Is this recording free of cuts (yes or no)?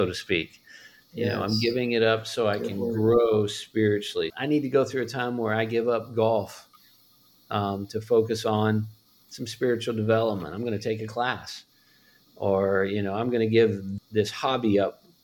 no